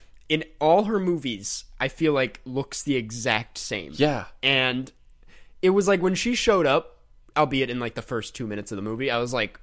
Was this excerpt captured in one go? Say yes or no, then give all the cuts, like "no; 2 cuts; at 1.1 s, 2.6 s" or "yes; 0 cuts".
yes; 0 cuts